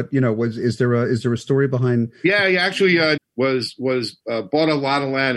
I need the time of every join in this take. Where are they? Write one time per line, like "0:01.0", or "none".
0:03.2